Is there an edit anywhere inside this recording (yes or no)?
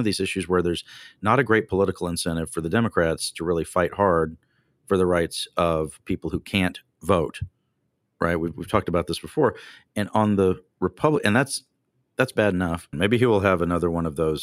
yes